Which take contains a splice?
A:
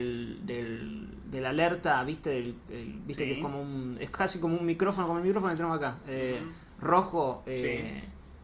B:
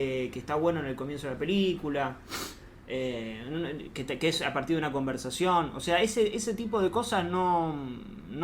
A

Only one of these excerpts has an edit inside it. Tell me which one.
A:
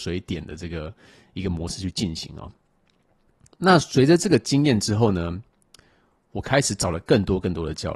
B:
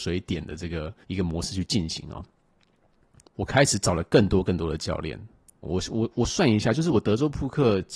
B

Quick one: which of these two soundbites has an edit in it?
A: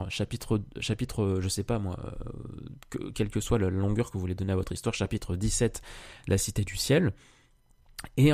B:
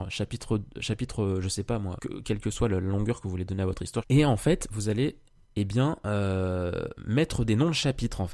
B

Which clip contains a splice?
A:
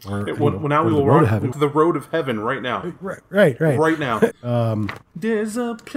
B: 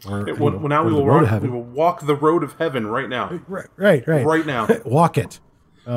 A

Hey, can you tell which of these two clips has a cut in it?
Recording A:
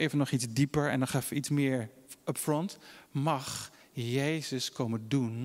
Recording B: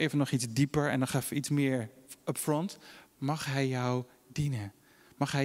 B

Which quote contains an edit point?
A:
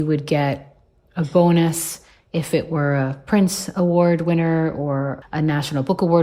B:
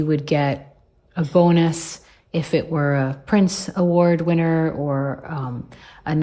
A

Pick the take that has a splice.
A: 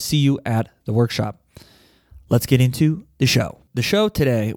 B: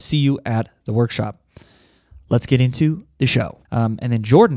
B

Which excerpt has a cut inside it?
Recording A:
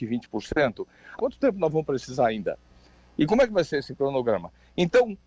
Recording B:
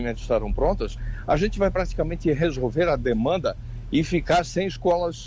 A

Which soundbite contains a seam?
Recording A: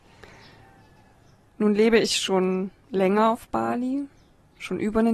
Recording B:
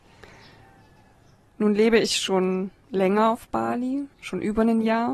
B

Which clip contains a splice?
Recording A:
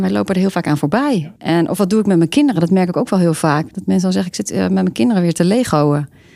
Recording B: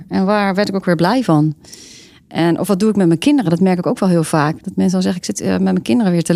A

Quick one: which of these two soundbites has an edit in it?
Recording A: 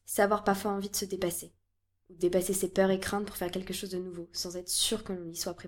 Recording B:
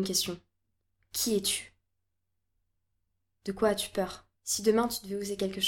B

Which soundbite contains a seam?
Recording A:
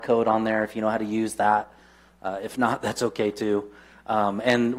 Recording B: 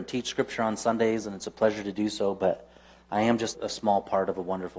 B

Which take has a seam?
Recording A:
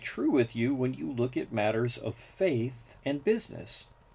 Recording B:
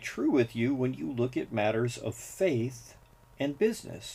A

